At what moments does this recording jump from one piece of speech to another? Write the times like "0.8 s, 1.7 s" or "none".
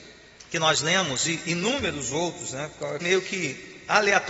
3.0 s

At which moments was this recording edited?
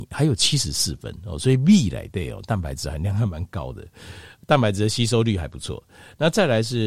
none

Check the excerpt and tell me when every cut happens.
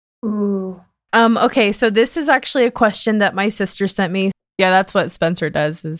1.1 s, 4.3 s

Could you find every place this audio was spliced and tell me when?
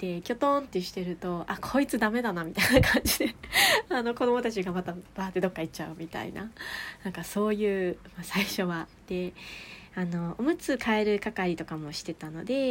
none

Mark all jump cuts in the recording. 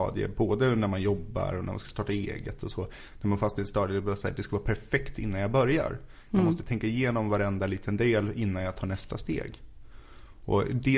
none

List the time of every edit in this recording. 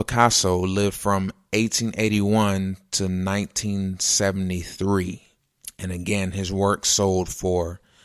none

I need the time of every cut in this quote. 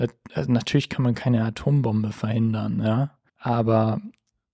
3.3 s

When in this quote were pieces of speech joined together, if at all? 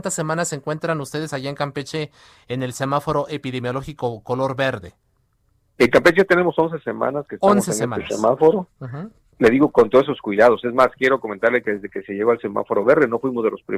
none

